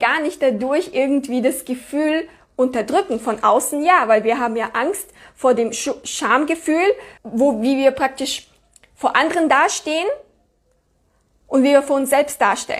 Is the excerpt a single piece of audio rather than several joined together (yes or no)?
no